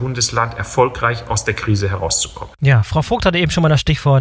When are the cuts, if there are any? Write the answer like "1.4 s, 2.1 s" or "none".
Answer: none